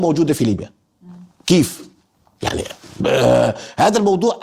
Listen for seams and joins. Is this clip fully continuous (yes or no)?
no